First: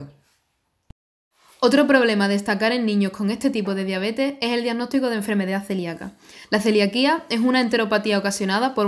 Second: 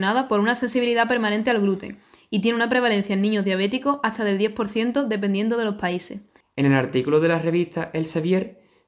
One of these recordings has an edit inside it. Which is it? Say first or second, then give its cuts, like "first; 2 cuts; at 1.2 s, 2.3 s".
second; 1 cut; at 6.4 s